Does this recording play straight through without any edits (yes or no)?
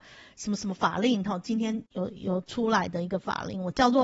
no